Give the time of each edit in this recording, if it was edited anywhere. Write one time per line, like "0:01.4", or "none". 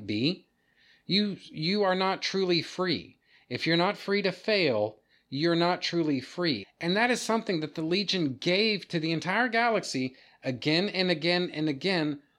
0:06.6
0:08.9